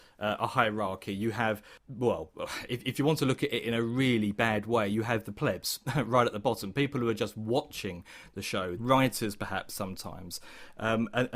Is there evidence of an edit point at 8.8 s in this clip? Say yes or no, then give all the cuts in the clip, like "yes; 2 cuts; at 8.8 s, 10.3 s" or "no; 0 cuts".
yes; 1 cut; at 8.8 s